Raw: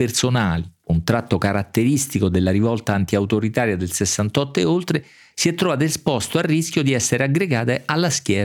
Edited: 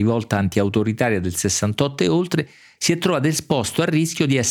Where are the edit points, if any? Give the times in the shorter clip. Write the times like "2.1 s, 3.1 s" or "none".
none

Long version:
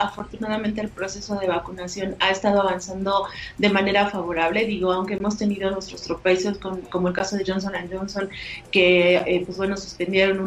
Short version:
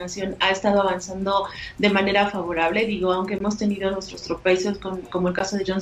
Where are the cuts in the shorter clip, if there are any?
none

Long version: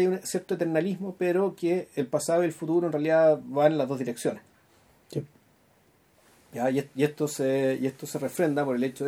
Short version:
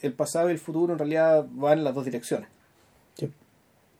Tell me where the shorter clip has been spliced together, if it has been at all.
none

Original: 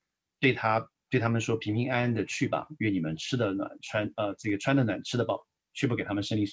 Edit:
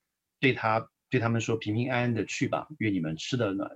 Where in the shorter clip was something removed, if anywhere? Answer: none

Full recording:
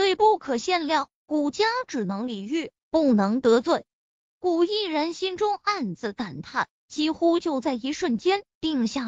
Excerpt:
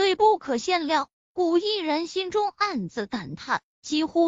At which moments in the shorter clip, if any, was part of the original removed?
1.1 s

